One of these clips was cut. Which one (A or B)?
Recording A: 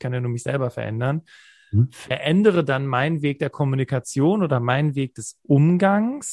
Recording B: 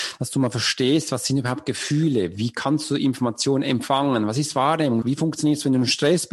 B